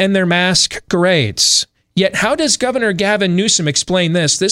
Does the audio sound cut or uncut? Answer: uncut